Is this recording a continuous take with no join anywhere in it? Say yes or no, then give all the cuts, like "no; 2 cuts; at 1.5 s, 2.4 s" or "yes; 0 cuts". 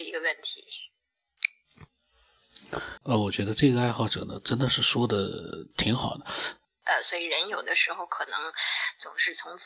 no; 2 cuts; at 3.0 s, 6.6 s